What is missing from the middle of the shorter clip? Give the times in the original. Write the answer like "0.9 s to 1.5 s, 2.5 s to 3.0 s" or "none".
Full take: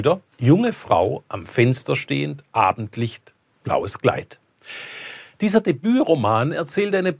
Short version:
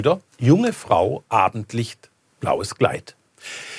1.2 s to 2.5 s